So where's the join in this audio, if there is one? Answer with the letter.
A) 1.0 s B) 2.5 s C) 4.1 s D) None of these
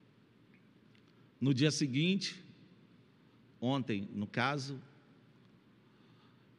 D